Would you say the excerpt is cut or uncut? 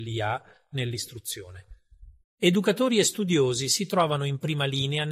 cut